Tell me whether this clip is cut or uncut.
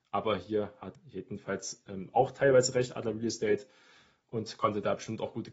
cut